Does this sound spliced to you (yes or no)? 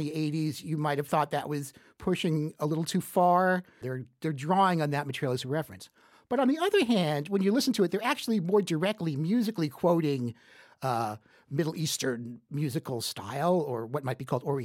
yes